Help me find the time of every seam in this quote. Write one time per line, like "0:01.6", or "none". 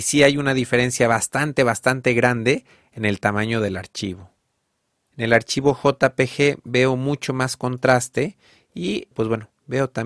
0:05.1
0:09.1